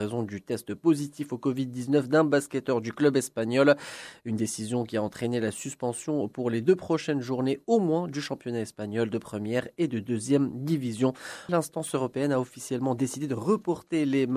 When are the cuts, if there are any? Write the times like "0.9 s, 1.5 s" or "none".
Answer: 11.5 s

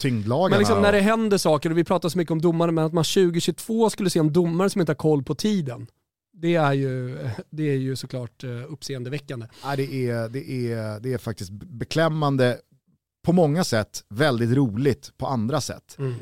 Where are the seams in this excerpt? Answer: none

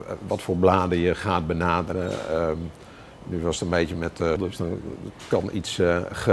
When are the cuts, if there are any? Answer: 4.4 s

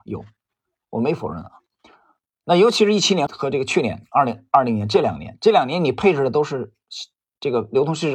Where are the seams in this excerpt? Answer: 3.3 s

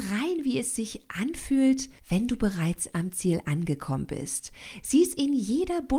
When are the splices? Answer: 2.0 s

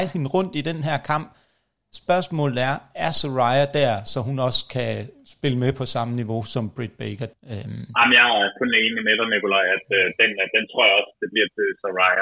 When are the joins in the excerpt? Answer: 7.3 s

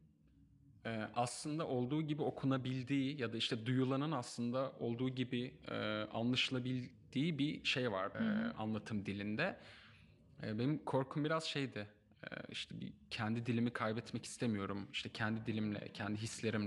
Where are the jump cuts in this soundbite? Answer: 8.1 s

